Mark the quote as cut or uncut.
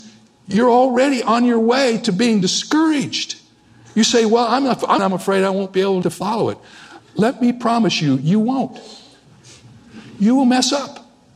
cut